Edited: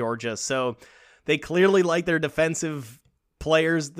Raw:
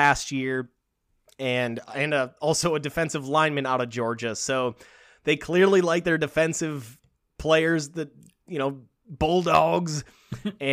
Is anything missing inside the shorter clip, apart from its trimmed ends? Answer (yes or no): no